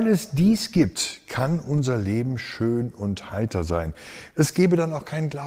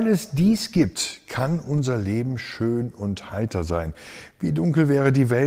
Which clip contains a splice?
first; 1 cut; at 4.3 s

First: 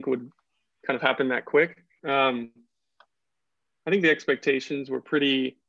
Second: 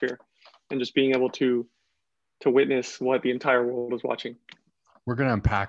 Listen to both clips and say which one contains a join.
first; 1 cut; at 2.0 s

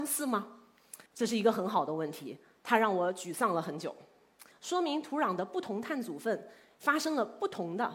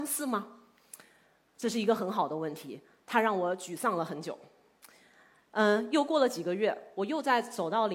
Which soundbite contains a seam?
first; 2 cuts; at 1.1 s, 4.5 s

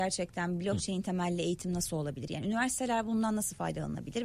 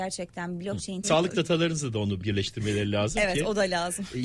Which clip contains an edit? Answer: second; 1 cut; at 1.0 s

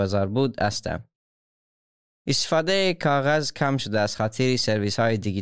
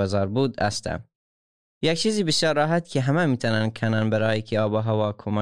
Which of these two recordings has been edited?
second; 1 cut; at 1.7 s

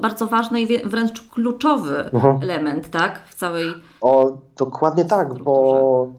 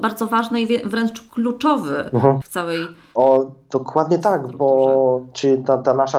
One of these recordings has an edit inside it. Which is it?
second; 1 cut; at 2.4 s

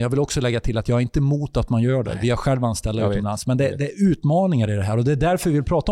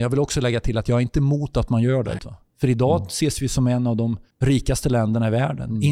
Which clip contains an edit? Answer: second; 2 cuts; at 2.2 s, 4.3 s

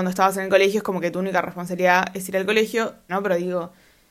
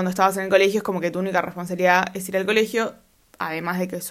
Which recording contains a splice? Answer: first; 1 cut; at 3.1 s

